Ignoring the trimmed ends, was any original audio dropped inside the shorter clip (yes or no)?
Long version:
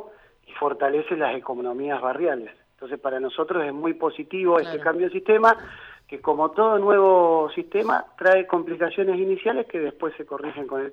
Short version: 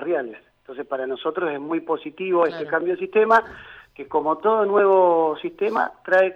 no